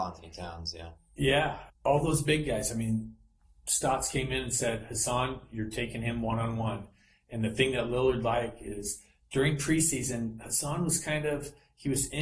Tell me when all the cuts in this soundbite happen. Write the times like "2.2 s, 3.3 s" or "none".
1.7 s